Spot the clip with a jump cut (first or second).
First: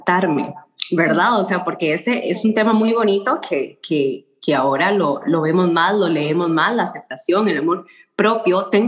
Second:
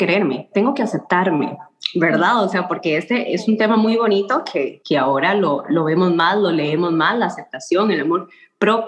second